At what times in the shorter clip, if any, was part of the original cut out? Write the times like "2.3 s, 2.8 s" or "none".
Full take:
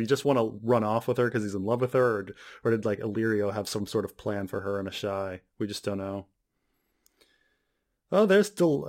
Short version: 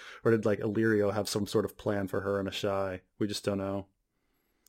none